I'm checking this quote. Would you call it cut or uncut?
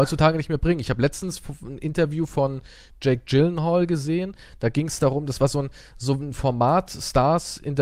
uncut